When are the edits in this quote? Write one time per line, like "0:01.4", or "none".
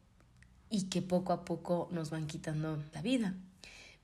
0:02.9